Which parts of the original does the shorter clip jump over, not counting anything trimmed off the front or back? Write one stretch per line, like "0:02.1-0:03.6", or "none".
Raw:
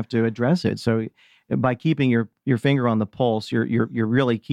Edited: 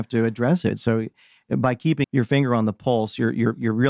0:02.0-0:02.4